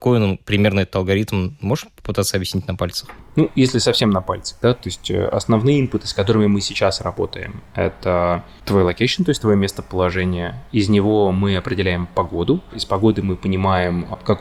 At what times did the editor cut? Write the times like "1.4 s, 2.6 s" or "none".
none